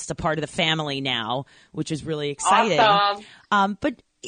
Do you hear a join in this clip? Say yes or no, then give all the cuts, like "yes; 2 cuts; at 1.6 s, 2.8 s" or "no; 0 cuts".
no; 0 cuts